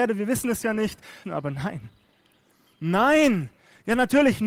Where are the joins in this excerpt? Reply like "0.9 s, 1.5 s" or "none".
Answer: 1.2 s